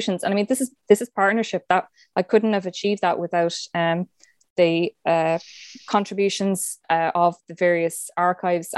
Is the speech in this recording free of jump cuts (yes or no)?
yes